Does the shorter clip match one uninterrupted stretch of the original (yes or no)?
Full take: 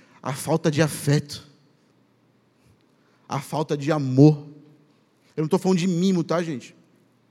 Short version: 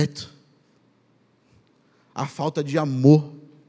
yes